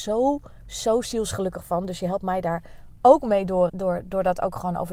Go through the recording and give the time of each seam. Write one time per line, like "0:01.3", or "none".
0:03.7